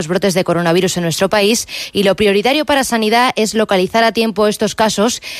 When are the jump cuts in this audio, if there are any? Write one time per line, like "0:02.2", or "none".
none